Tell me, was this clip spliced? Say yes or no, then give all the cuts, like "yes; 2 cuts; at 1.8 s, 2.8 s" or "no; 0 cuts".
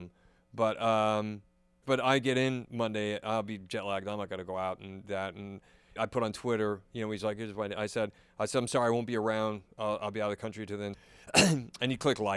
yes; 3 cuts; at 1.8 s, 6.0 s, 10.9 s